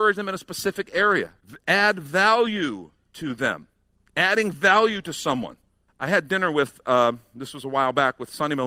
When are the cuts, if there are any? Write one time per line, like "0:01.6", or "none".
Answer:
none